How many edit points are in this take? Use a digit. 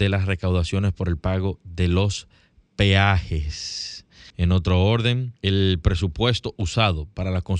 2